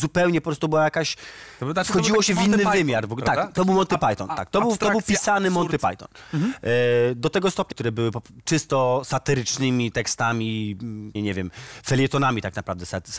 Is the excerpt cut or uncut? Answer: cut